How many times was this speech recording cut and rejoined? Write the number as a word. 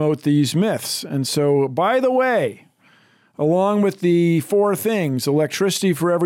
zero